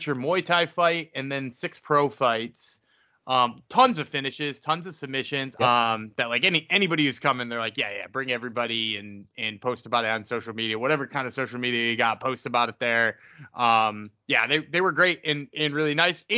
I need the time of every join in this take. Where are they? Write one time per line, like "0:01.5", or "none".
0:05.6